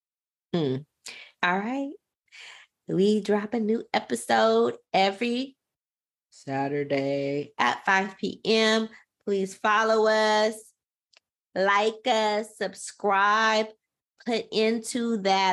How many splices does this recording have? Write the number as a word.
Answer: one